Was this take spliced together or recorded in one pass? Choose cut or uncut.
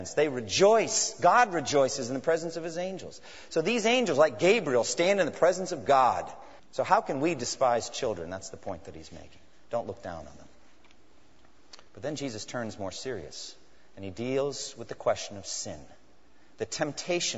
cut